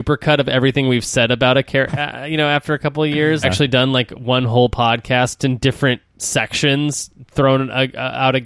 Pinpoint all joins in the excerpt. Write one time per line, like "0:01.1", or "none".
0:01.9
0:03.4
0:05.4